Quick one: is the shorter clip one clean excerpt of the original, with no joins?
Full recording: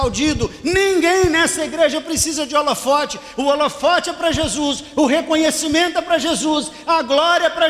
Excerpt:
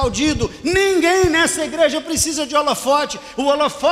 yes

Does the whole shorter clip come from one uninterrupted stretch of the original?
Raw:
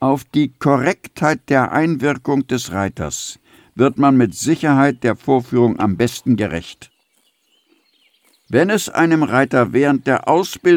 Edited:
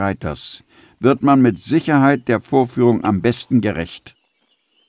yes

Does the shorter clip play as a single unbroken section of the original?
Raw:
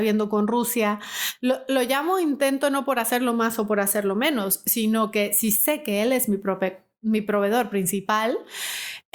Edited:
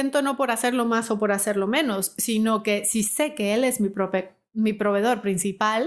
yes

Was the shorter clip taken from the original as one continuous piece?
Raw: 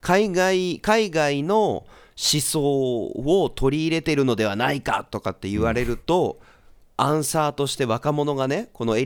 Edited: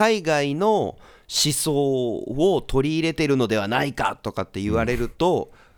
yes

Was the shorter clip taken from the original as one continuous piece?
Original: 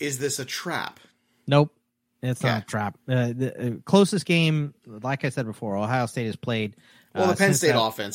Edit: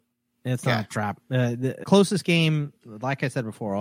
no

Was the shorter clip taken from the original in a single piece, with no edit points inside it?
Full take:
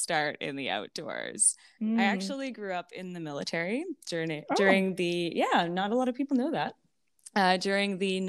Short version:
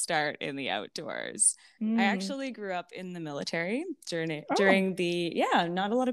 yes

